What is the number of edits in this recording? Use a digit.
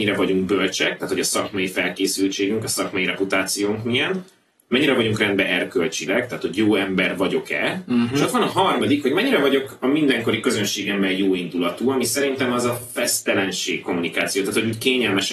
0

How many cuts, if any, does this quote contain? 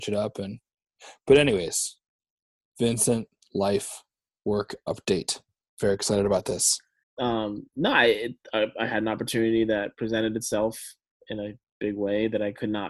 1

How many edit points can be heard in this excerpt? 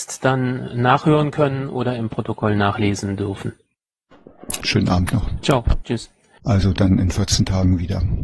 2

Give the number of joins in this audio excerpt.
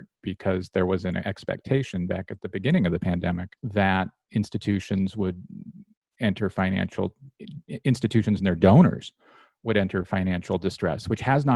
1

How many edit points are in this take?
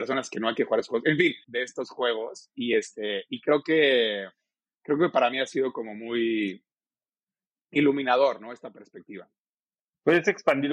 1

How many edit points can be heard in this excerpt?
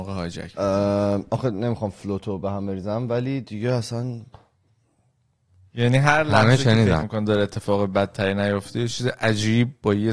1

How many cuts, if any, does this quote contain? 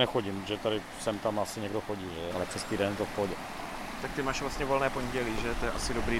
1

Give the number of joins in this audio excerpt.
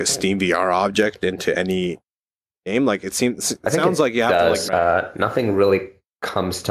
1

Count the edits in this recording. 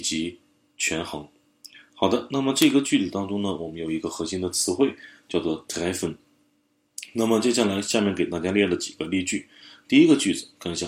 0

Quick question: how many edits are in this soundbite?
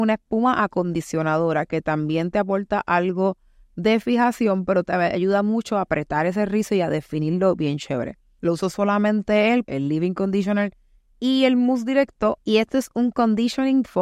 2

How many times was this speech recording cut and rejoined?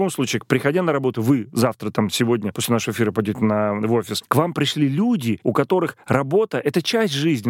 1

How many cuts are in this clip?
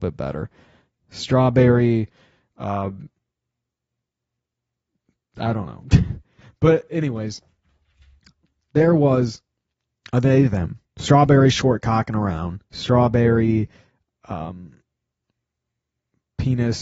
2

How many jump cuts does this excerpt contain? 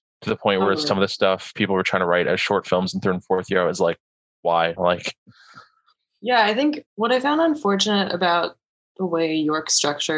2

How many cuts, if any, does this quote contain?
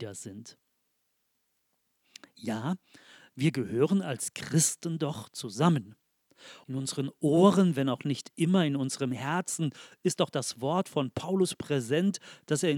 1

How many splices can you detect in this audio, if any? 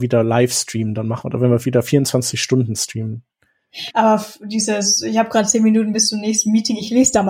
1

